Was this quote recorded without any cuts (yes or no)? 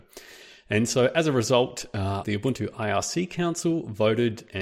no